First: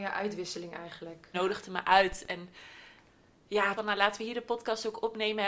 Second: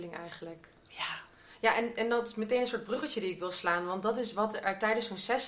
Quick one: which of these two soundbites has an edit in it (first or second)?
first